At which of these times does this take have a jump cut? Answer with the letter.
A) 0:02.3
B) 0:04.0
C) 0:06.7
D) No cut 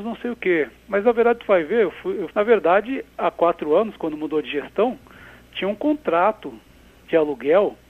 A